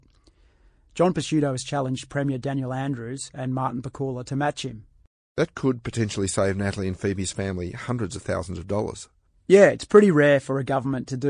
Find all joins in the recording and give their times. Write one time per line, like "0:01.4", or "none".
none